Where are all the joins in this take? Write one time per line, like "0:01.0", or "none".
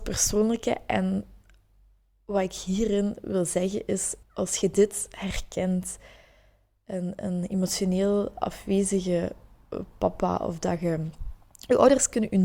0:04.2